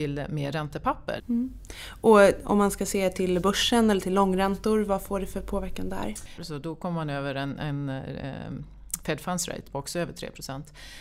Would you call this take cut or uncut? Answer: cut